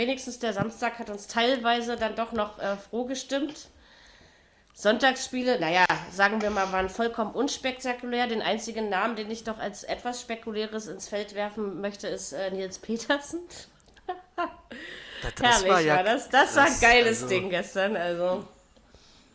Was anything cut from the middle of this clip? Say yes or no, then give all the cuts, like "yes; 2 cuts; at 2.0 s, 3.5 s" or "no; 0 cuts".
no; 0 cuts